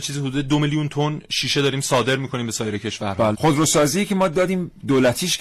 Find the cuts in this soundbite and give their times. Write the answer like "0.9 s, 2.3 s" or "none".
3.3 s